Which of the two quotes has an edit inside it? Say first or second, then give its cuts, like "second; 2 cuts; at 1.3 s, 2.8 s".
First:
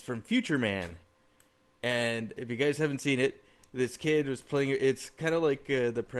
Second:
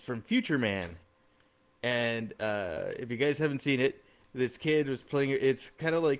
first; 1 cut; at 2.4 s